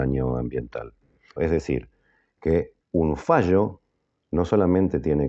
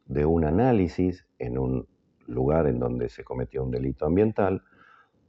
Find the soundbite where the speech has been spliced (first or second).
first